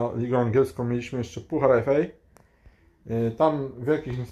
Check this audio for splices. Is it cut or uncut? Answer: uncut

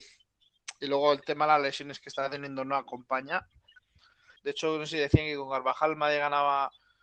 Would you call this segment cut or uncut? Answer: cut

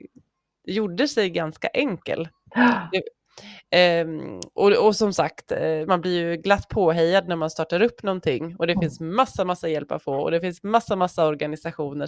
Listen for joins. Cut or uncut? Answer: uncut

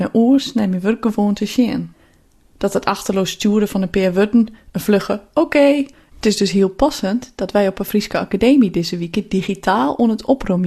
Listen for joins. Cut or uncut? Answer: cut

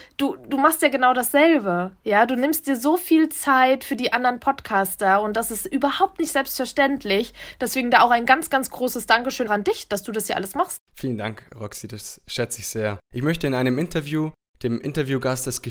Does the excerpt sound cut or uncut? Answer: cut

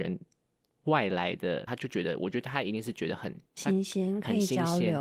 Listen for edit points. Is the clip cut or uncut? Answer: cut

